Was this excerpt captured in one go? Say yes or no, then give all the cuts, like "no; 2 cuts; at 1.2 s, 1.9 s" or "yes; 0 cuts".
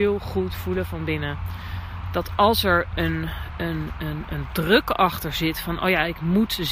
yes; 0 cuts